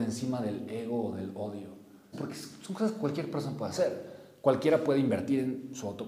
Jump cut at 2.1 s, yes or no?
yes